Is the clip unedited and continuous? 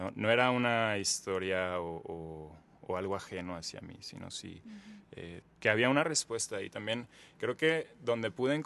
no; 1 cut; at 5.4 s

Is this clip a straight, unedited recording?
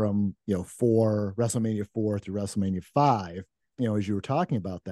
no; 1 cut; at 3.7 s

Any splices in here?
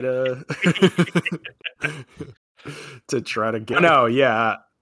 yes; 2 cuts; at 2.4 s, 3.7 s

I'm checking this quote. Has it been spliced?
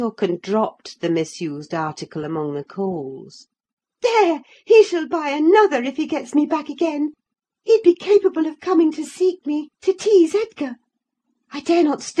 no; 0 cuts

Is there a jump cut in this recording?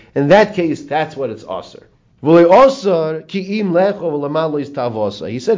yes; 1 cut; at 2.1 s

